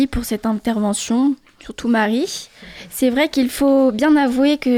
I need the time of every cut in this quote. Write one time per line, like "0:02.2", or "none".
none